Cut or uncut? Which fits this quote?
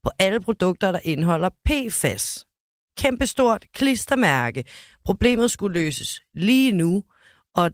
uncut